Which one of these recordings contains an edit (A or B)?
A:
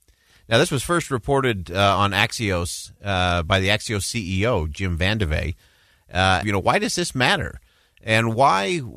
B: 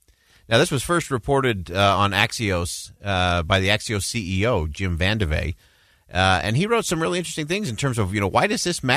A